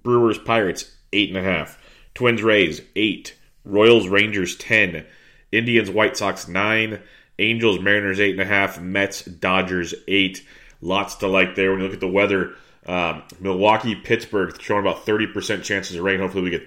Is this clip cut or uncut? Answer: uncut